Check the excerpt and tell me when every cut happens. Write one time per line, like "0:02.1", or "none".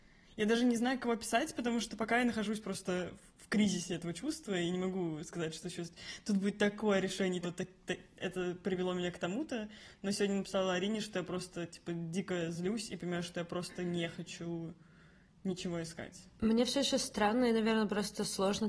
0:07.4